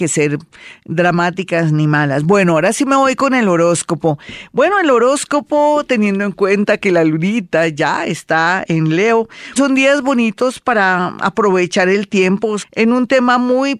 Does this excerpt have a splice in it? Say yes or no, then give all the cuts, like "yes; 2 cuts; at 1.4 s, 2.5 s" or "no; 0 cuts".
yes; 2 cuts; at 9.6 s, 12.6 s